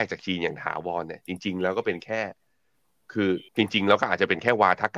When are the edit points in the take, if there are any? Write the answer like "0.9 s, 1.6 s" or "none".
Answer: 3.5 s